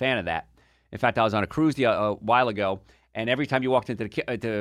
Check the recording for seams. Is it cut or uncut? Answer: uncut